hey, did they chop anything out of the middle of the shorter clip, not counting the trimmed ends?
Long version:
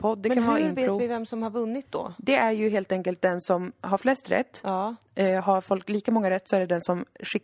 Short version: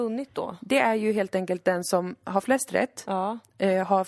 no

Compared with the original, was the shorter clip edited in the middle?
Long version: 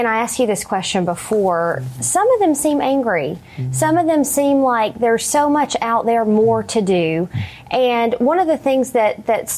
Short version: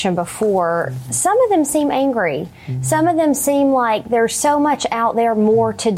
no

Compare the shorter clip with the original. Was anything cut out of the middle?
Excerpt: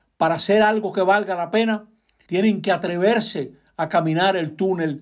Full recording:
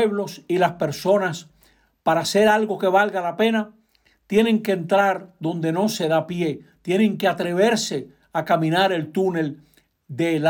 yes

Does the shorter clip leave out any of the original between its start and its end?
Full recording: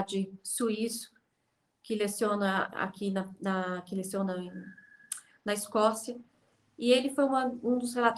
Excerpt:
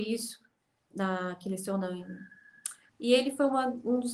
yes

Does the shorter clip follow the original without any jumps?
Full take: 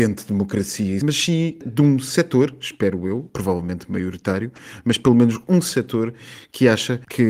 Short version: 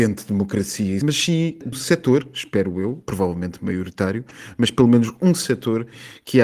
no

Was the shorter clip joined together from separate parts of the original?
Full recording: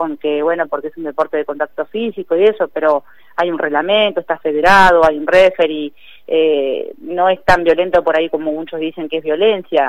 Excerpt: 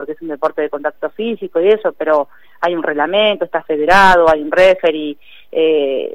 no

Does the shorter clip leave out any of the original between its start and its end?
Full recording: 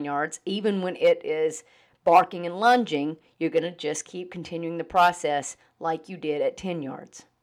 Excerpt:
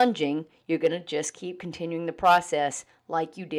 no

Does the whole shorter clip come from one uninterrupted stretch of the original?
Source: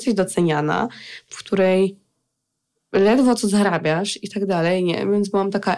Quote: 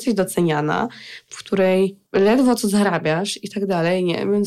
no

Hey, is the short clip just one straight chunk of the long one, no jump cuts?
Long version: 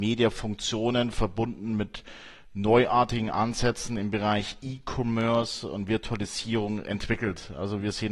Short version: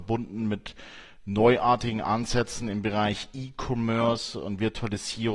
yes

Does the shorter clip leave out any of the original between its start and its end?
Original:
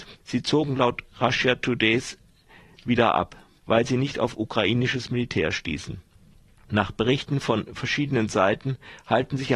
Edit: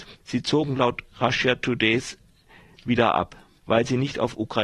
no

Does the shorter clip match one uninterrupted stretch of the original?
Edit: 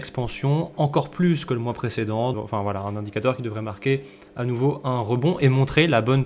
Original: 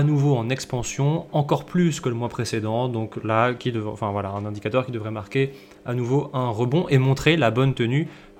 no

